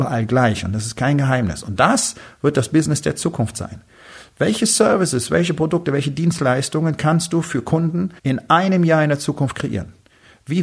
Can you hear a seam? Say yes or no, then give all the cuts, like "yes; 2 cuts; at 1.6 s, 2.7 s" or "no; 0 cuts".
yes; 1 cut; at 8.2 s